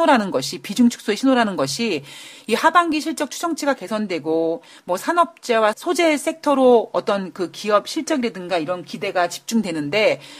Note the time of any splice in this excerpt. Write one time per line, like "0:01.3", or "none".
0:05.7

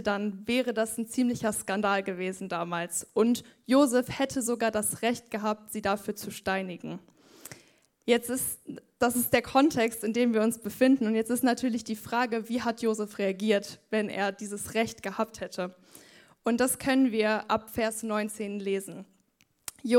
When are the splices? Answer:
none

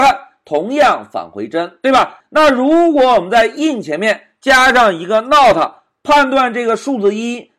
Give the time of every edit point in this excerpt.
none

